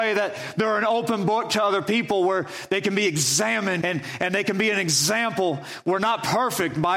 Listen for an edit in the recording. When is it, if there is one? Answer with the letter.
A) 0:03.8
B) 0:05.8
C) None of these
A